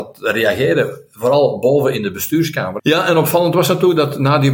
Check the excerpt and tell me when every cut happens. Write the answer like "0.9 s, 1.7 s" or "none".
2.8 s